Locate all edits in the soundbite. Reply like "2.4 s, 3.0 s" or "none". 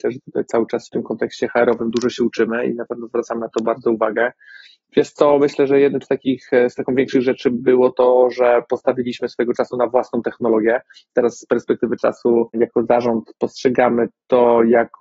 none